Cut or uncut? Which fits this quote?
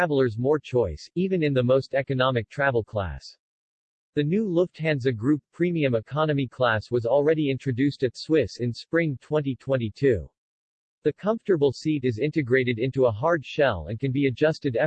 uncut